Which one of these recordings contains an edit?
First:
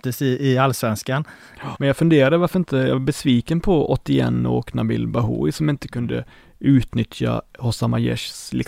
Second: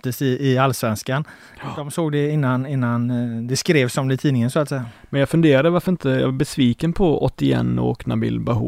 first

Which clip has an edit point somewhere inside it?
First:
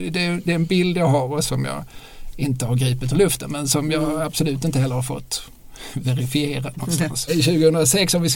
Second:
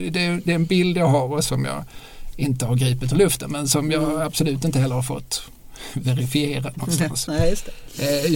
first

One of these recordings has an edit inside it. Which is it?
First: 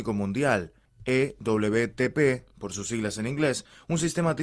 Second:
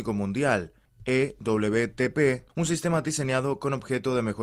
second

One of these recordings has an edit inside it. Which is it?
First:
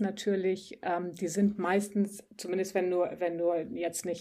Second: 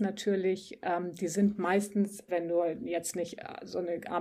second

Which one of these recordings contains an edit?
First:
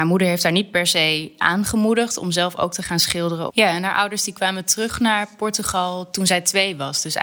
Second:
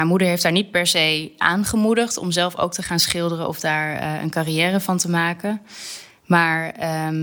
first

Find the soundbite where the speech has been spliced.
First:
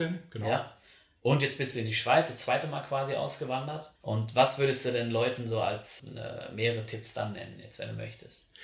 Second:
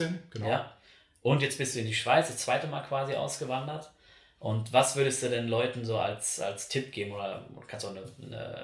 first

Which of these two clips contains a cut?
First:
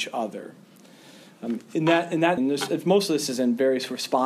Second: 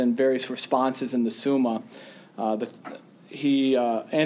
first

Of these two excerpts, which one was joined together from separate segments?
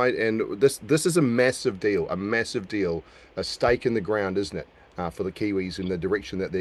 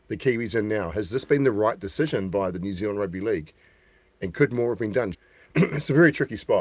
second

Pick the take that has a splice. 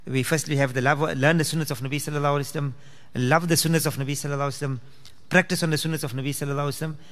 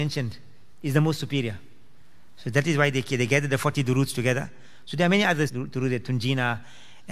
second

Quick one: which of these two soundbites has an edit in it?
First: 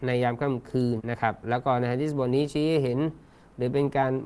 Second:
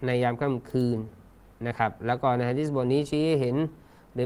first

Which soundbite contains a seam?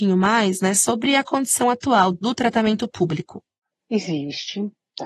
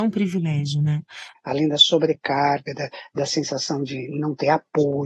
second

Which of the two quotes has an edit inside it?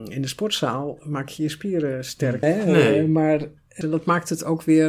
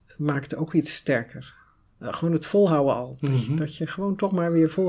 first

